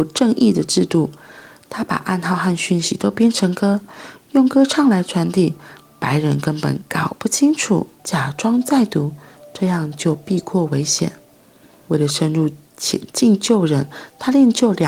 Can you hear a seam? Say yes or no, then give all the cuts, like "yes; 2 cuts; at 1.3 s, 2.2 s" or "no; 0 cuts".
yes; 1 cut; at 8.0 s